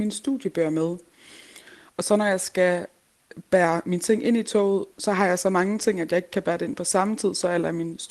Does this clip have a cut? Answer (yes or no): no